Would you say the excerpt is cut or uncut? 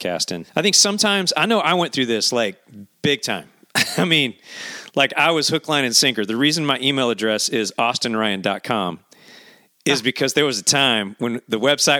uncut